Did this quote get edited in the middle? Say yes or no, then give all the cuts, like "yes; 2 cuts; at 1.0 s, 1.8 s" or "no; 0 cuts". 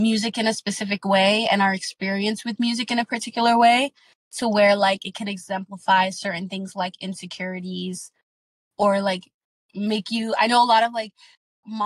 no; 0 cuts